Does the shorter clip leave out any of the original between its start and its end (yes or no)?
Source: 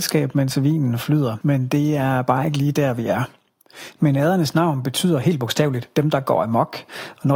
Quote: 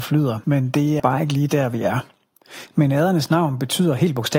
yes